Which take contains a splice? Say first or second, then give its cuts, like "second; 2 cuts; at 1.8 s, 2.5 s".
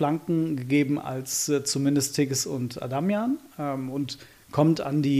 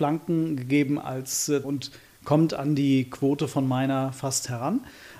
second; 1 cut; at 1.6 s